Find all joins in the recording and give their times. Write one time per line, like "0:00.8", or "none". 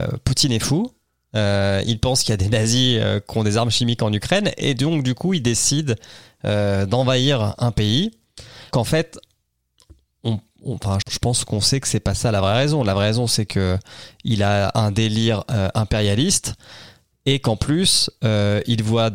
0:08.7
0:11.0

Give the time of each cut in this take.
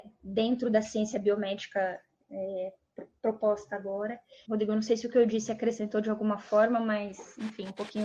0:04.4

